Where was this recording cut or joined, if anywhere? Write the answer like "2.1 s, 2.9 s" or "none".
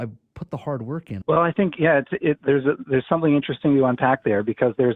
1.2 s